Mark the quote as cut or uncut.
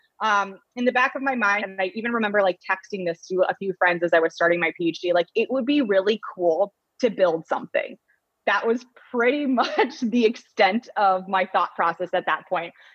cut